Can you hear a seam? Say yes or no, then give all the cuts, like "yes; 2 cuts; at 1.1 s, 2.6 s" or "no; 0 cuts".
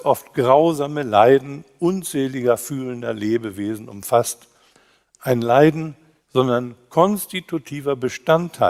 yes; 1 cut; at 6.2 s